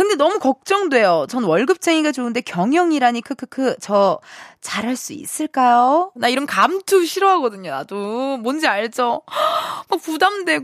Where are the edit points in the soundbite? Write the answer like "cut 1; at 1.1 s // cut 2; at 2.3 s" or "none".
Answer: cut 1; at 6.2 s